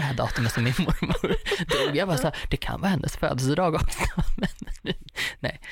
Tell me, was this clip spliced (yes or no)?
no